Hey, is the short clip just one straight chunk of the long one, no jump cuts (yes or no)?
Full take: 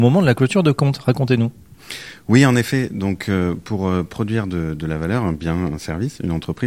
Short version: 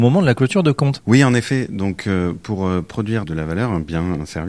no